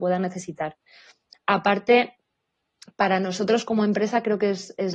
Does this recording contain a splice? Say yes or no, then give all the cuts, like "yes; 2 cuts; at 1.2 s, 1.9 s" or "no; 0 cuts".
no; 0 cuts